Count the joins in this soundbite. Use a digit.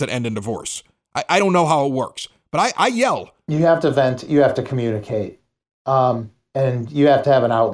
0